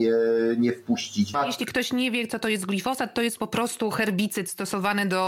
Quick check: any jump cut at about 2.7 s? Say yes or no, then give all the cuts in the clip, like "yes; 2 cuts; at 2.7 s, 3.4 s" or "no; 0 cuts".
no; 1 cut; at 1.3 s